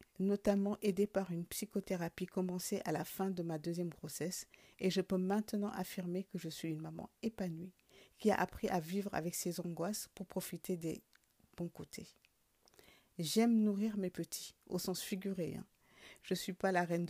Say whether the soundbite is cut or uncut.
uncut